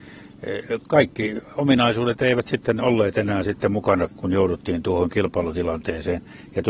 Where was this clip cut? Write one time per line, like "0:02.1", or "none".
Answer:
0:04.1

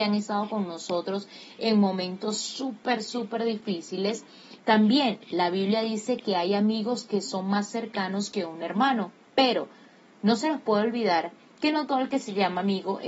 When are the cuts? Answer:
0:04.6

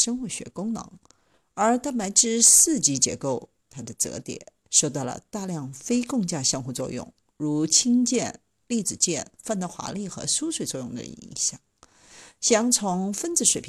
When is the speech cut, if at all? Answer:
0:03.6

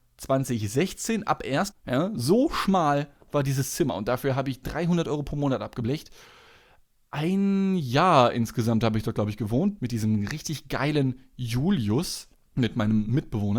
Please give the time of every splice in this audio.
0:01.7
0:09.8
0:12.3

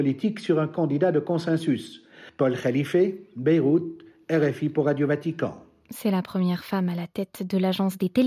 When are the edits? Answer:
none

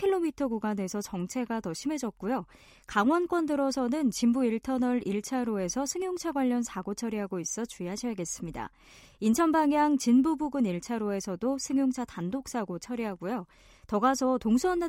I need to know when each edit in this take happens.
none

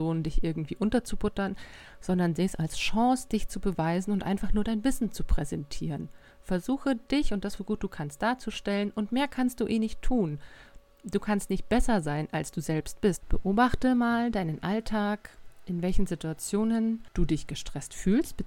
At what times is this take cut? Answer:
0:07.6
0:13.2

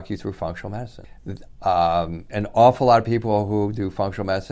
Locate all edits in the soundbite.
0:02.3

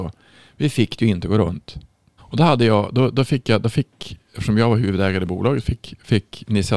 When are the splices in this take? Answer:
0:02.2

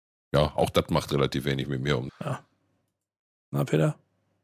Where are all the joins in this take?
0:02.1

